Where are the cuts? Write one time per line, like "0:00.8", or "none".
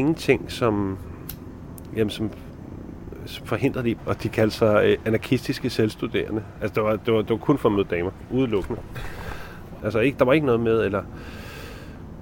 0:04.0
0:09.8